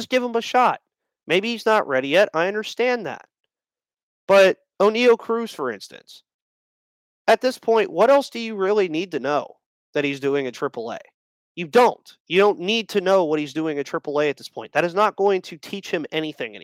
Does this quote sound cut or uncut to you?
uncut